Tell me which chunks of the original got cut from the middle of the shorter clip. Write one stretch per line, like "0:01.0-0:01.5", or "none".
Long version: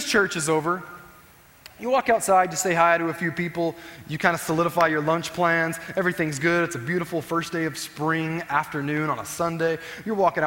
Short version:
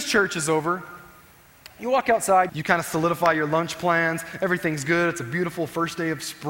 0:02.5-0:04.0